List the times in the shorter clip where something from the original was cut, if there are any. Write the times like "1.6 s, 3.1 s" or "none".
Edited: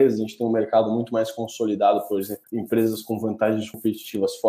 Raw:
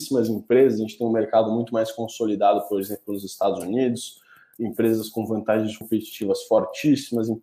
2.4 s